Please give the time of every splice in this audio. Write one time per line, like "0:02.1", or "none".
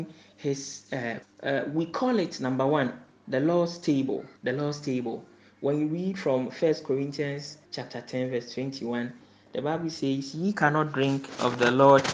0:01.2
0:04.4
0:07.6